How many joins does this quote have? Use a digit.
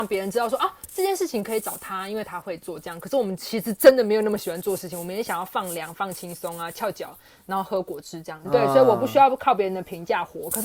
1